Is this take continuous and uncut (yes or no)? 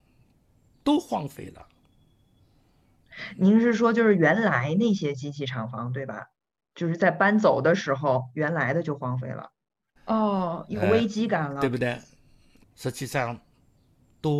no